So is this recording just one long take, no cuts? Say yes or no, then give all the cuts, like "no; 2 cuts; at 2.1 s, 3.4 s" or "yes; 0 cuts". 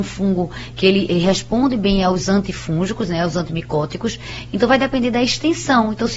yes; 0 cuts